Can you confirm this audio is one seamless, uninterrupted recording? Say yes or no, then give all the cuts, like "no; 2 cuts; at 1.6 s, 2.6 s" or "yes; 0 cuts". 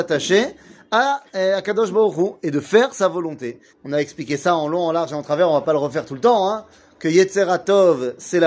no; 1 cut; at 3.7 s